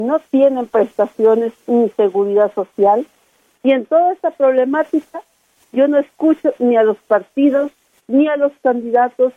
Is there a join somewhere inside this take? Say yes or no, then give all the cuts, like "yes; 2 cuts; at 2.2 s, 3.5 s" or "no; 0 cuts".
yes; 1 cut; at 3.5 s